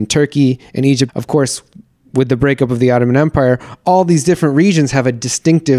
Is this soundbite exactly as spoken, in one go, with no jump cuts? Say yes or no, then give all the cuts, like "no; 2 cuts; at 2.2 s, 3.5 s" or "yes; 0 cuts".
no; 1 cut; at 1.1 s